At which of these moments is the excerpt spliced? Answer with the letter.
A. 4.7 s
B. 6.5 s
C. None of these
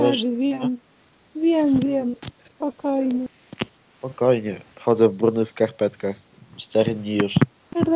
C